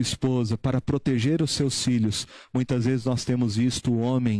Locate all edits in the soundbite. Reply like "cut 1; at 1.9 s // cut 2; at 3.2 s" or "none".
none